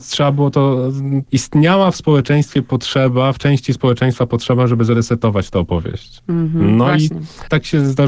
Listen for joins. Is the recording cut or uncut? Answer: uncut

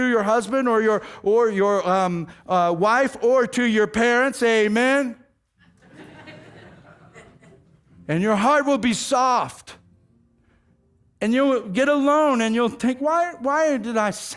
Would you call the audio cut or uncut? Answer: uncut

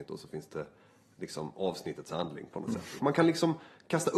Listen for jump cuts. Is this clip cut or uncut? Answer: cut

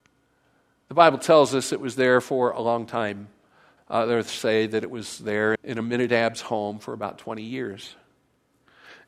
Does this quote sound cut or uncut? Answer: cut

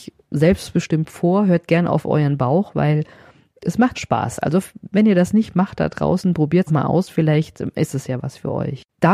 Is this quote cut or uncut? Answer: cut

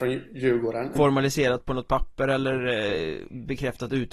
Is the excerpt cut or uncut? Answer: cut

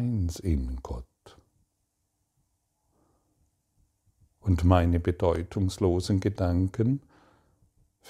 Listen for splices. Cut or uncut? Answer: uncut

